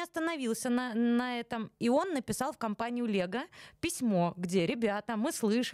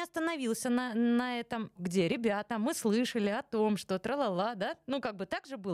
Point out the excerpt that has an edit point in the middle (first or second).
second